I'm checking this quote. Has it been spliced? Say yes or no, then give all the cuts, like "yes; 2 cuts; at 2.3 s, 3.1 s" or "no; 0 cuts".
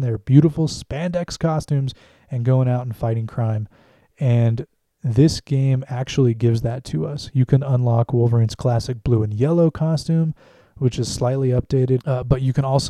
yes; 1 cut; at 12.0 s